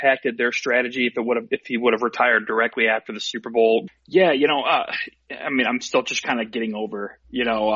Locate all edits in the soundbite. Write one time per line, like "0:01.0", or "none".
0:03.9